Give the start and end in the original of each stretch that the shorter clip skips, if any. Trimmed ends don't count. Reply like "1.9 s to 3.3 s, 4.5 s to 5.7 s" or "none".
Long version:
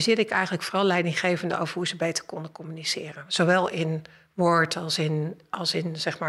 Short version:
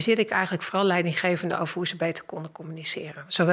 none